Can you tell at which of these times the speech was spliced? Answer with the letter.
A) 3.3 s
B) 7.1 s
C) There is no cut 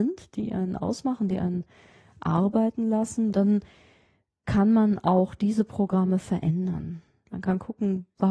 A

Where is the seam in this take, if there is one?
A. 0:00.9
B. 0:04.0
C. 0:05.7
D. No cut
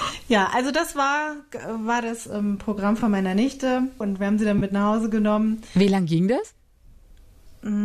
B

